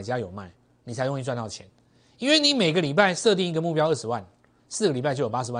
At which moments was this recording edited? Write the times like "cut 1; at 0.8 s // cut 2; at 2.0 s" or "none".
none